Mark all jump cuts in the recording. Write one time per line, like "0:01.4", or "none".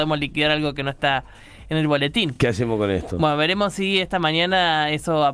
none